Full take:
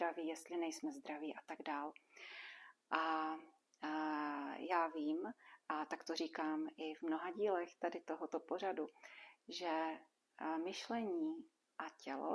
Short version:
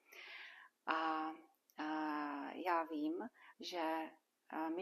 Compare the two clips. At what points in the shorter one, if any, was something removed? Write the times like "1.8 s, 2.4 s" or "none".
3.5 s